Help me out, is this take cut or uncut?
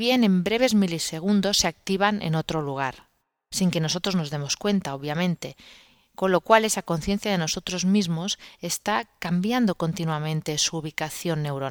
uncut